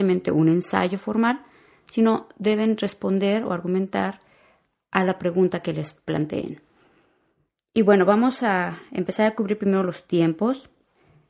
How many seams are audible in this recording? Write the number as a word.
zero